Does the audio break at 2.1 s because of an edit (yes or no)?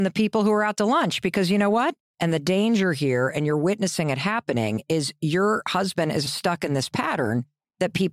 yes